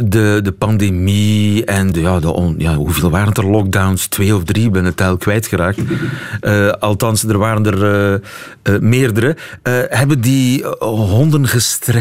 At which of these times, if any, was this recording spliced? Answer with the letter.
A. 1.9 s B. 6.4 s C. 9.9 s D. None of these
A